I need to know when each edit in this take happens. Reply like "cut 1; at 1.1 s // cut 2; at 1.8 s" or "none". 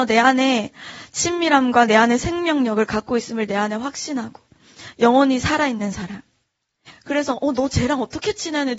cut 1; at 6.9 s